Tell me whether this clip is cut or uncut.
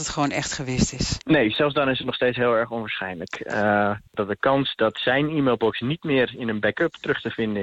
cut